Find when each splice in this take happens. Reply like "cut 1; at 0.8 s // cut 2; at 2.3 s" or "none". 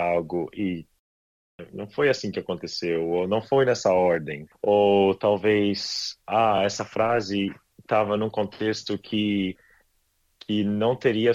none